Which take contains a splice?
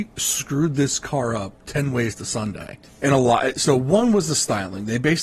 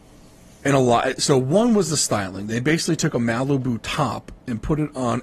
first; 1 cut; at 2.9 s

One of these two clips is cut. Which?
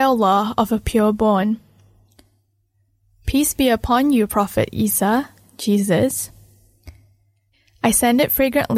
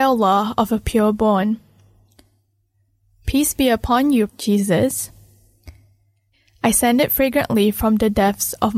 second; 1 cut; at 4.3 s

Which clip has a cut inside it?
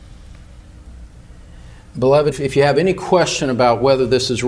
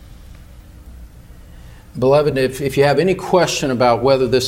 first; 1 cut; at 2.3 s

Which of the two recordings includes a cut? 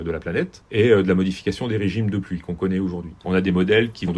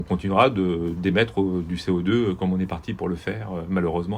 first; 1 cut; at 3.2 s

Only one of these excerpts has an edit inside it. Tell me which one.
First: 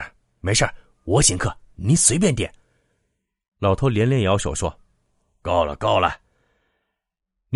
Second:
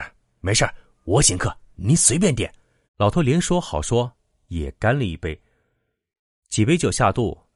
second; 1 cut; at 2.8 s

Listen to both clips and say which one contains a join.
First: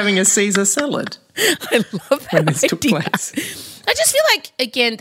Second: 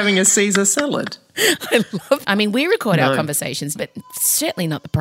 second; 2 cuts; at 2.2 s, 3.8 s

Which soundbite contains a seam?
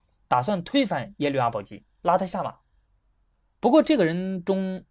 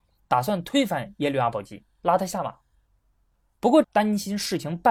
second; 1 cut; at 3.8 s

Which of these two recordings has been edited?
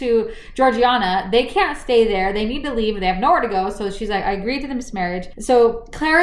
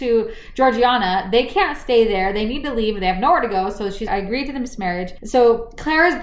second; 1 cut; at 4.1 s

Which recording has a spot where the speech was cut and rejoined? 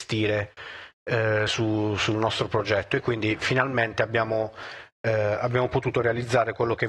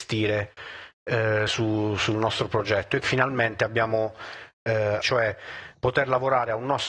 second; 2 cuts; at 3.0 s, 5.0 s

